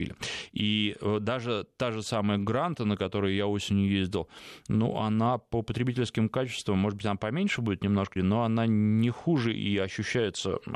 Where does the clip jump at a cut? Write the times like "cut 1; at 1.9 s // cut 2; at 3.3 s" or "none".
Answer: cut 1; at 8.2 s